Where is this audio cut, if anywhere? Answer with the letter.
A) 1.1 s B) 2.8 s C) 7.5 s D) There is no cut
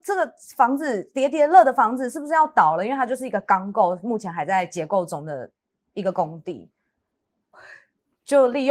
C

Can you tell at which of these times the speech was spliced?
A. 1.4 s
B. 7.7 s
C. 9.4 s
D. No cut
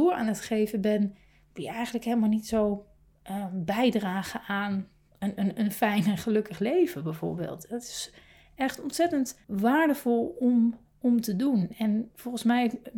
C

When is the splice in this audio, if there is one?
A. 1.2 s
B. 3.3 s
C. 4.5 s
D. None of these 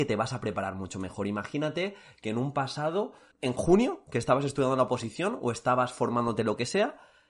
B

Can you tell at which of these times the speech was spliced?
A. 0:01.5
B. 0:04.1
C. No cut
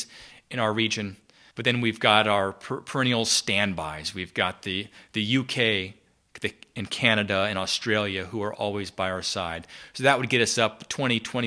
A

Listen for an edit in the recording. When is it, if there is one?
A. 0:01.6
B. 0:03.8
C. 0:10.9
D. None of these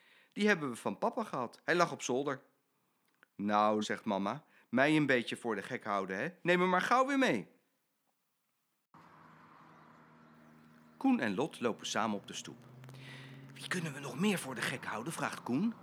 B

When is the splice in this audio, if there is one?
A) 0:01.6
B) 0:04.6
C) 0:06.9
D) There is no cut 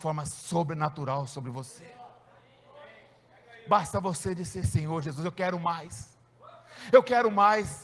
B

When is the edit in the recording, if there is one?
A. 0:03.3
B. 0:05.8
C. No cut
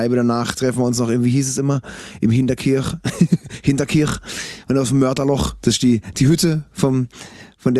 C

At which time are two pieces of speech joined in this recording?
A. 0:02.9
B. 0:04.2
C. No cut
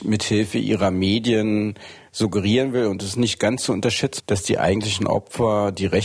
B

